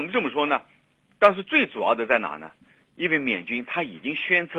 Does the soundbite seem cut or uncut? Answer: cut